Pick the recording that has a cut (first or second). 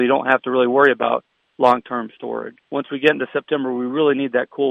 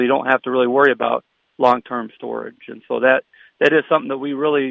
first